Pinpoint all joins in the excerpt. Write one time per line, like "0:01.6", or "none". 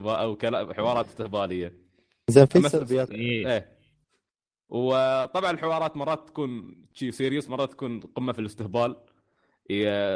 0:03.1